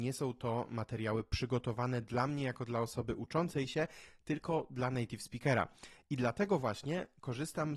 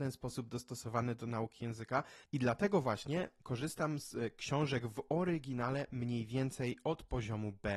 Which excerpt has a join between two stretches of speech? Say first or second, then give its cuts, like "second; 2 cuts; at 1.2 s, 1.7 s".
second; 1 cut; at 2.2 s